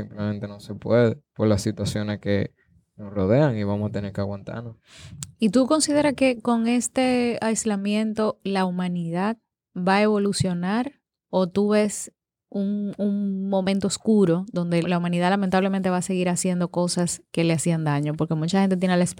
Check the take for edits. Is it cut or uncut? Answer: cut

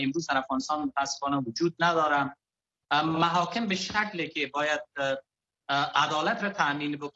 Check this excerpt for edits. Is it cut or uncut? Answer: uncut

